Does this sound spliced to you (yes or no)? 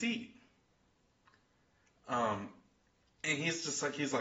no